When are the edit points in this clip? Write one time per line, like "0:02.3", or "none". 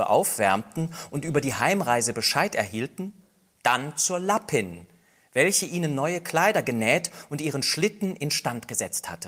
none